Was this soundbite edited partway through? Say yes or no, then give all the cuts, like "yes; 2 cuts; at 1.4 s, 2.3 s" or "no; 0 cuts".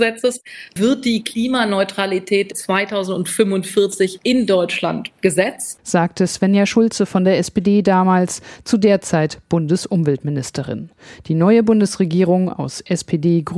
no; 0 cuts